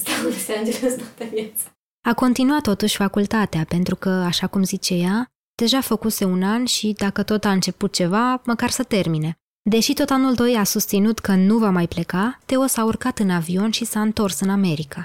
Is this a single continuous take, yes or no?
no